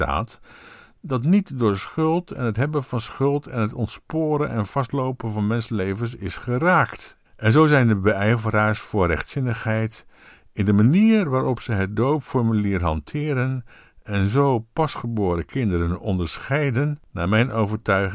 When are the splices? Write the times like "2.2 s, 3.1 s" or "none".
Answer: 7.3 s